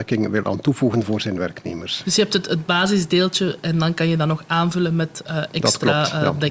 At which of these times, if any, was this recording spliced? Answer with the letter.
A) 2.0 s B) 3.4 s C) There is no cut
A